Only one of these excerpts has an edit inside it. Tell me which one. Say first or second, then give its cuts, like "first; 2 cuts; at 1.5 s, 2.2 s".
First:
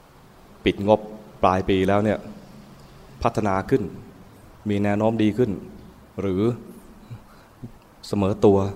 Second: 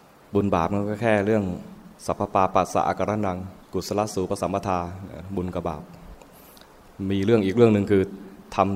second; 2 cuts; at 1.9 s, 3.6 s